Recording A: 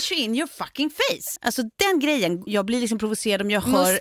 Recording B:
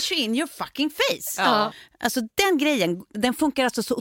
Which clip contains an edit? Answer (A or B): A